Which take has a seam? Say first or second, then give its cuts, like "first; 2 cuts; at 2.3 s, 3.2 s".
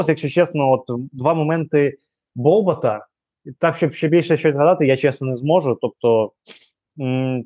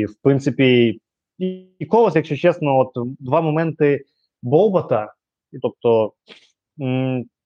second; 1 cut; at 5.6 s